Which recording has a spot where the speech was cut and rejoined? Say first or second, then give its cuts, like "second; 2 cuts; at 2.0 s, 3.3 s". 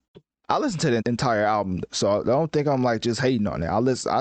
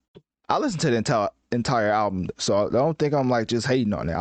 first; 1 cut; at 1.0 s